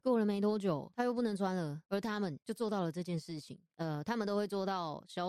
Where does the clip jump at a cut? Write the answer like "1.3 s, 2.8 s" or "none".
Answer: 1.9 s, 3.7 s